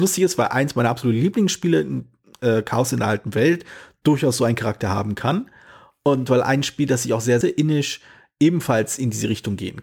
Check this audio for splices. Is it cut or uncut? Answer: cut